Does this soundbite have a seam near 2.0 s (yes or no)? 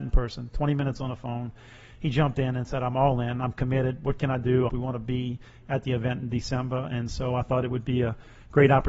no